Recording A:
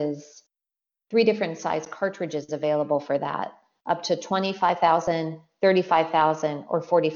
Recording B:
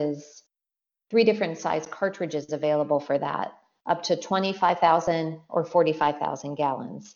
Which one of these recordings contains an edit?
B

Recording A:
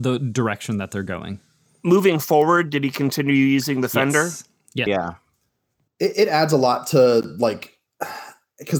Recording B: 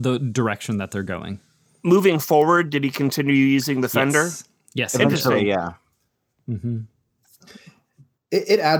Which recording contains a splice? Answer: A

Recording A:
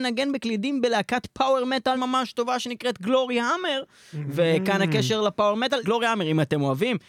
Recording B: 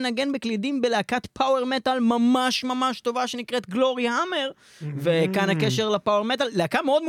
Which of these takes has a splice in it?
A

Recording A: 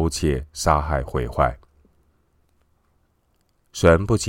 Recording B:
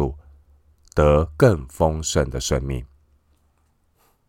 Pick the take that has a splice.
A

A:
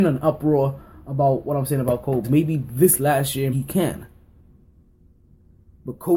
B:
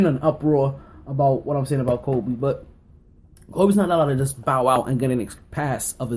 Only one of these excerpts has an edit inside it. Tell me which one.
A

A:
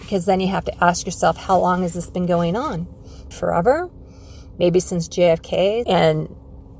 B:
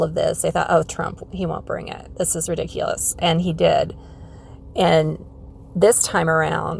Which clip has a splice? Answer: A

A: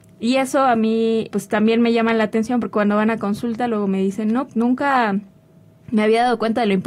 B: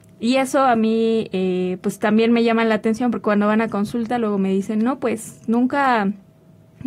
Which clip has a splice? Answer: A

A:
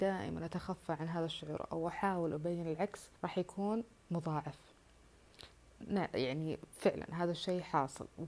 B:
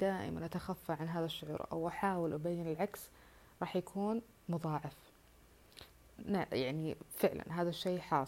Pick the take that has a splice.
A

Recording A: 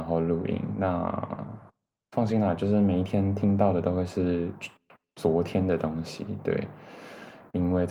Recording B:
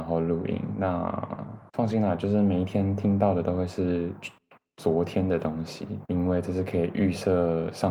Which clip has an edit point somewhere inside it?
B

